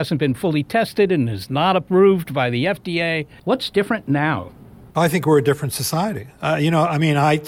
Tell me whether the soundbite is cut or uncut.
cut